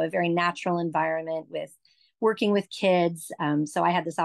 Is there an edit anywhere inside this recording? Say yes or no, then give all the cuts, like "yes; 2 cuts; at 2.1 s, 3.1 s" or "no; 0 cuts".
no; 0 cuts